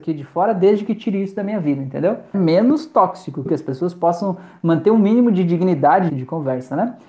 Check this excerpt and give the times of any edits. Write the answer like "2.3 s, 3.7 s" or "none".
2.3 s, 3.5 s, 6.1 s